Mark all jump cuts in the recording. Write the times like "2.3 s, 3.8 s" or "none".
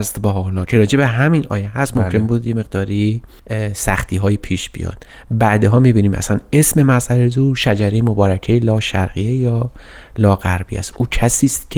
none